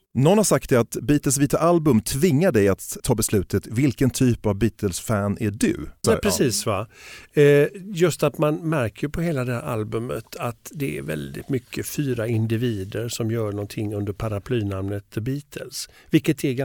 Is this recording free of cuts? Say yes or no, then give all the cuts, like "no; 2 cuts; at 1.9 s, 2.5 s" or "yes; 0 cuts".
no; 2 cuts; at 3.0 s, 6.0 s